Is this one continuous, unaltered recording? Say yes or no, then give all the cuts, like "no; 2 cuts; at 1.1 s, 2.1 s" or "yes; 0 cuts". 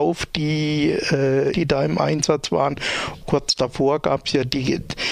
no; 2 cuts; at 1.5 s, 3.2 s